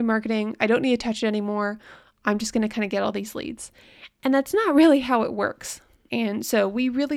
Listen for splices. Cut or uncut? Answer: cut